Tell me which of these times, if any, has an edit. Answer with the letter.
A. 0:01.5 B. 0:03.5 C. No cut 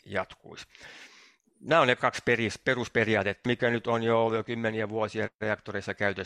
B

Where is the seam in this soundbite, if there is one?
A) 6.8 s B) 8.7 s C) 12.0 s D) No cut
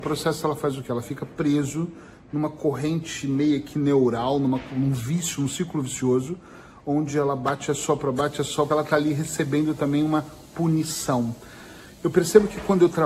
B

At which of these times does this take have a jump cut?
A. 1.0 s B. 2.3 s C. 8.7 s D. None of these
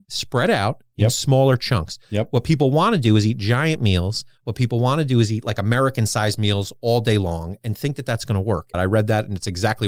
C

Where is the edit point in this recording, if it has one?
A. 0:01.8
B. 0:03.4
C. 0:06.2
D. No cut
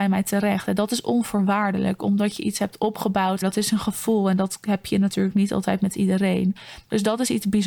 B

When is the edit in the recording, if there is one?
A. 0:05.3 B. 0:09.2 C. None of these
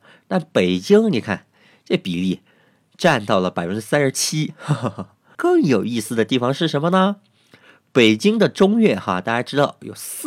A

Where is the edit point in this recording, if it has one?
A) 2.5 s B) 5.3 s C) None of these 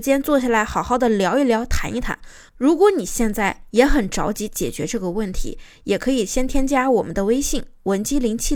A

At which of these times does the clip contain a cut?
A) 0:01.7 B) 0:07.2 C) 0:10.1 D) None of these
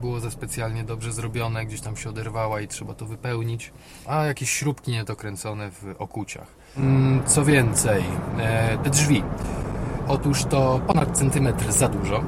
C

